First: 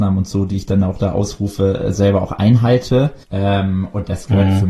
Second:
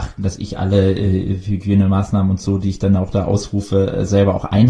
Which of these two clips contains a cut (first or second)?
first